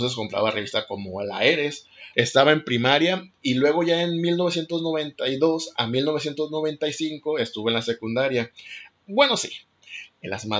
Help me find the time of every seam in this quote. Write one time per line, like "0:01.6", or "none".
0:02.1
0:08.9